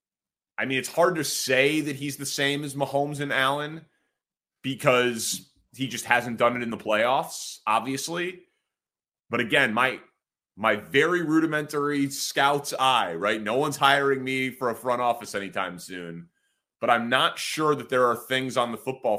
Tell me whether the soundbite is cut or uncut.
uncut